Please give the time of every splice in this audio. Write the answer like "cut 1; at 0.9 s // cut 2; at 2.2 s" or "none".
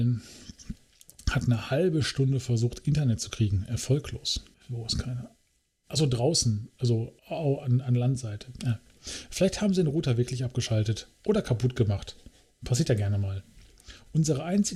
cut 1; at 4.5 s // cut 2; at 7.2 s